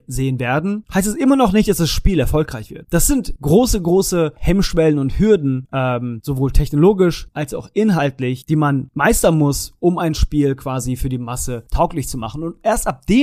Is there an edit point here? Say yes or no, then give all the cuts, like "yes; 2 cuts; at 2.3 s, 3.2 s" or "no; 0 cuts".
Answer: no; 0 cuts